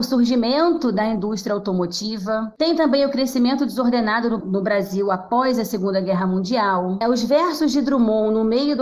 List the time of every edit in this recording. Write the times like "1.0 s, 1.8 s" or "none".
4.4 s, 7.0 s

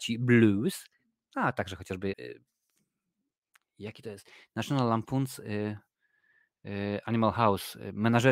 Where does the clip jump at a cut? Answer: 2.1 s

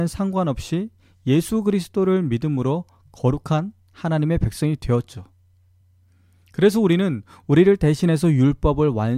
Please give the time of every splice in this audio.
none

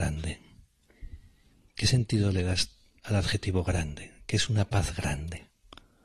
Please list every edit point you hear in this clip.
none

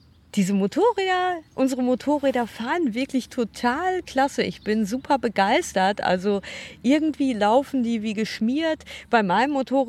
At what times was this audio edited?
none

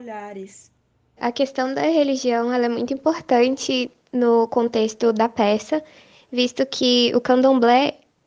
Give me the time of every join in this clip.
1.2 s

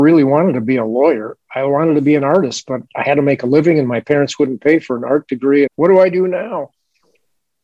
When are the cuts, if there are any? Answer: 5.7 s

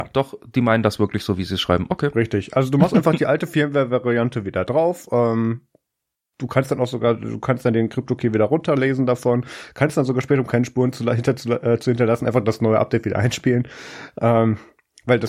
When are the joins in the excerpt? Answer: none

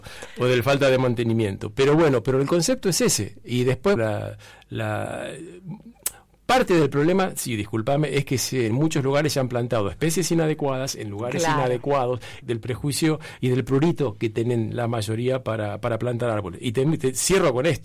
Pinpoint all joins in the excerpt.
4.0 s, 12.4 s

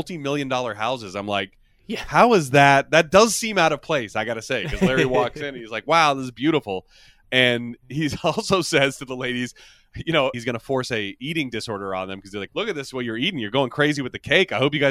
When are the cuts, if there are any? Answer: 10.3 s, 12.5 s

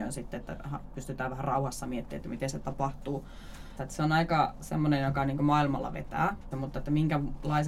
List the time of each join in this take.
3.8 s, 6.5 s

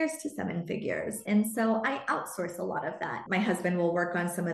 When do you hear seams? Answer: 1.2 s

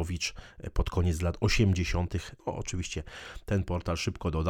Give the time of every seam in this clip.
2.4 s

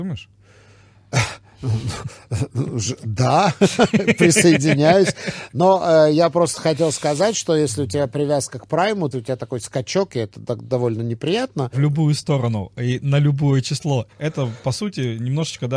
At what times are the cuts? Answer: 9.1 s, 11.7 s, 14.1 s

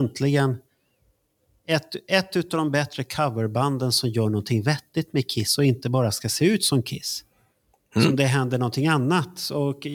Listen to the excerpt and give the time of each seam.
none

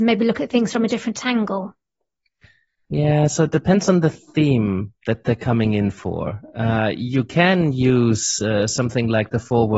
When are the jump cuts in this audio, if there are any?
none

